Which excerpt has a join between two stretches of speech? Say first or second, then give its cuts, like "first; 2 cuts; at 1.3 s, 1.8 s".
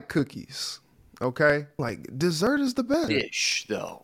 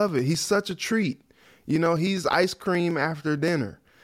first; 2 cuts; at 1.8 s, 3.1 s